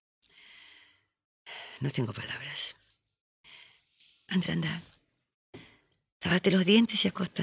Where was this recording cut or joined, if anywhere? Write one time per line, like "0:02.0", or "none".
0:04.4

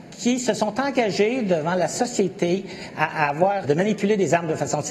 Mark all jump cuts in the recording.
0:03.6

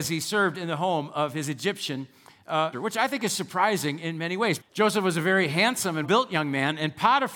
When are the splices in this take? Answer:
0:02.7
0:04.6
0:06.0

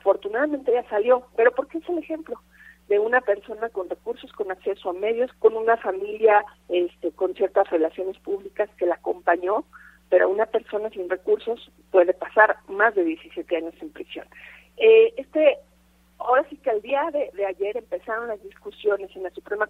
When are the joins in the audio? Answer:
0:05.3

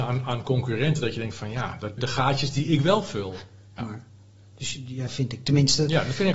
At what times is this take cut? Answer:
0:02.0
0:03.8
0:05.1

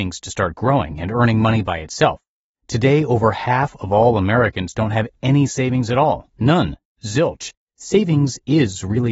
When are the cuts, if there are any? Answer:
0:02.5
0:07.6

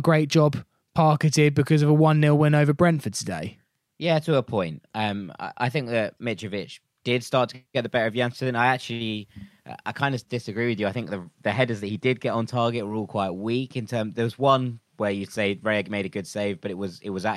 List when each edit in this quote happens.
none

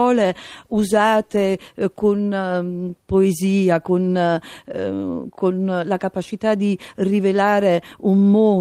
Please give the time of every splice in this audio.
none

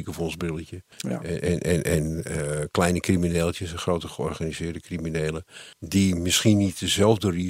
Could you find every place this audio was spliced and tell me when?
0:00.9
0:05.7

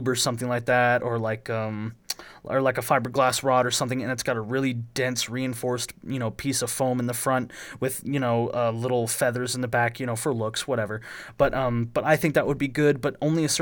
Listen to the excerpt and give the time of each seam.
none

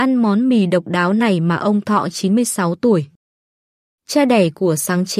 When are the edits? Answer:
none

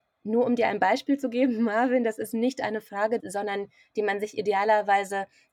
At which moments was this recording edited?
0:03.2

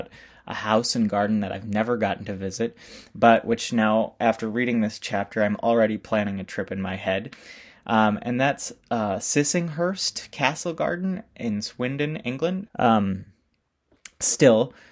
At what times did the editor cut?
0:12.7

